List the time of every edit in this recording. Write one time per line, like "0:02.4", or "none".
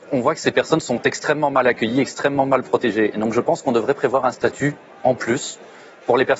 none